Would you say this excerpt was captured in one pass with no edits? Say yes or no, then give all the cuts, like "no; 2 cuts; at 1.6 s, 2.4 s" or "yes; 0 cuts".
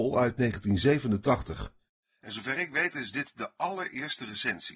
yes; 0 cuts